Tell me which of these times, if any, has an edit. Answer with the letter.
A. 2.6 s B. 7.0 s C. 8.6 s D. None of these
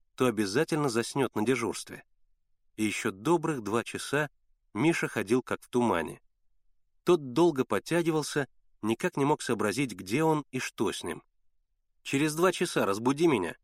B